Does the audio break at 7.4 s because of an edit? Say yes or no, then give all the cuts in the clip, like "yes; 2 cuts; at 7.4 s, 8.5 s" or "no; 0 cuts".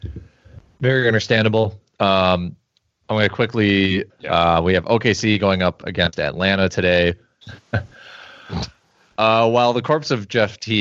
yes; 2 cuts; at 4.1 s, 7.4 s